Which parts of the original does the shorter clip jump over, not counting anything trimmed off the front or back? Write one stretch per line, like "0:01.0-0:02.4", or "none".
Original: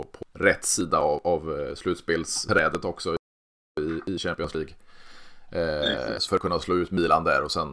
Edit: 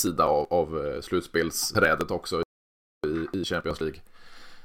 none